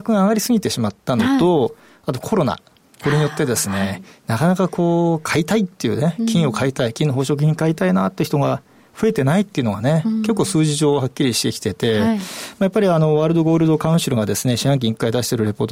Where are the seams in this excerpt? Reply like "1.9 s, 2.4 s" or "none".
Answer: none

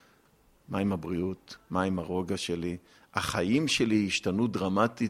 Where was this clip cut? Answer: 1.6 s

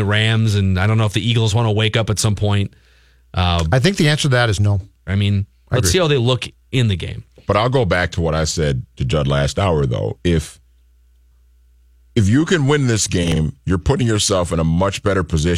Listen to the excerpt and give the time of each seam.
5.1 s

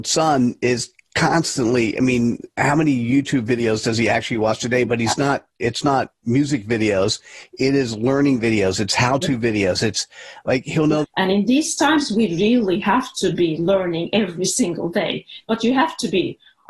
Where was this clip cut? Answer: 11.0 s, 15.4 s

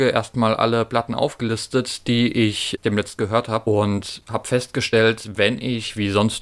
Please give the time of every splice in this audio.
none

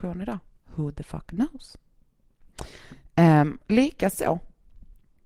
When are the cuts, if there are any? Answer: none

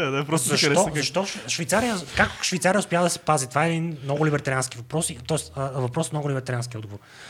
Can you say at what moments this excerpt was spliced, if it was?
none

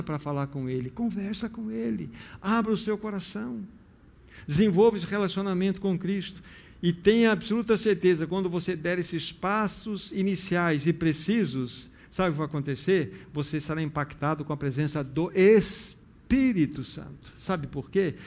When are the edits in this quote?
none

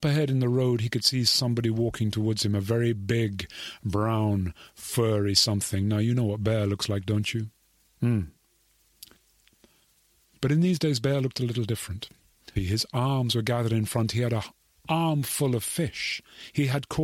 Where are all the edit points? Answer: 12.6 s

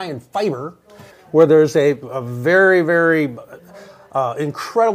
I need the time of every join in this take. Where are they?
1.1 s

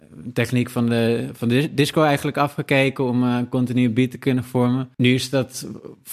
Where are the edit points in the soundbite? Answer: 4.9 s

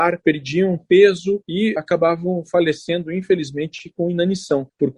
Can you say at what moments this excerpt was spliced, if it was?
none

